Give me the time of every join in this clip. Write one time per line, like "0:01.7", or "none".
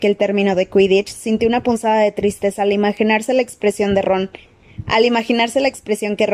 none